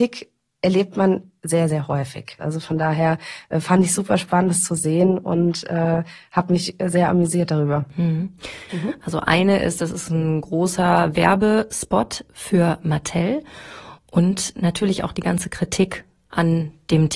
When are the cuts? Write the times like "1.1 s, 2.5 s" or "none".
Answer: 2.4 s, 8.7 s

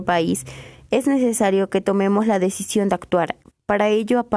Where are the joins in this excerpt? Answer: 1.8 s

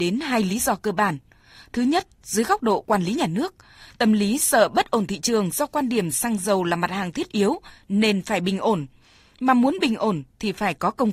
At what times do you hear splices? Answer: none

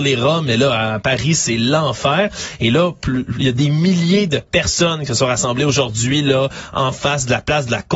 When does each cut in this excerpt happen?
none

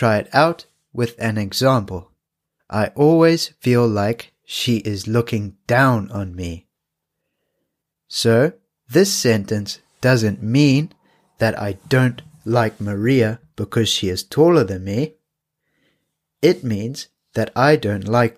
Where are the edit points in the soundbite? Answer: 2.6 s

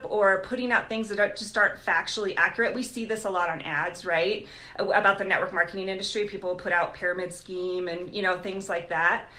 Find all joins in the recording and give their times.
none

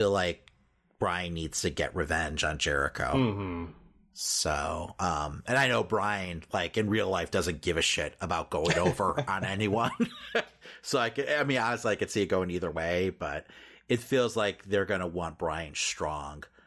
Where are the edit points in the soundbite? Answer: none

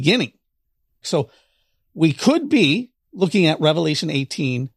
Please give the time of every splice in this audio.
1.0 s, 3.0 s

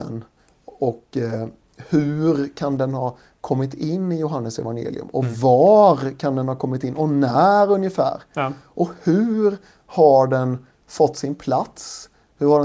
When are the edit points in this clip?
none

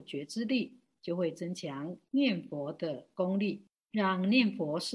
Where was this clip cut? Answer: none

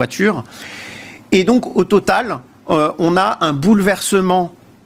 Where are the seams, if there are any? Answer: none

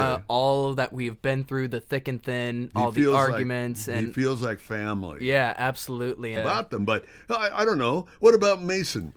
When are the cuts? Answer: 6.4 s

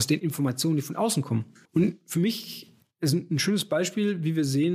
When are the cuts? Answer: 1.6 s

